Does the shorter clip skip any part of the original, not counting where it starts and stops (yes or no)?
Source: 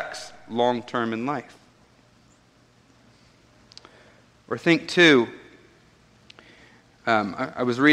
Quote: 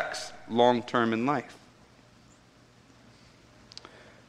no